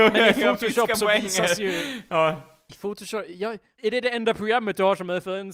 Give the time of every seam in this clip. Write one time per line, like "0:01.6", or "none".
0:03.8